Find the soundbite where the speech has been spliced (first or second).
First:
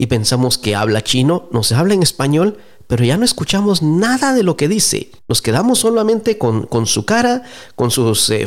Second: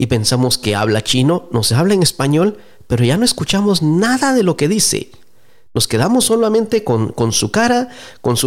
first